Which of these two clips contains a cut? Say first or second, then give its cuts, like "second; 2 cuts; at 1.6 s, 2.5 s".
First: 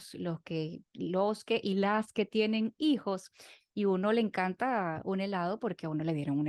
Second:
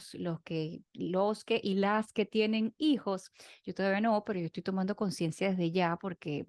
first; 1 cut; at 3.6 s